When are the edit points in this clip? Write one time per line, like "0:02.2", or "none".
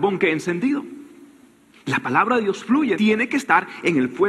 0:02.9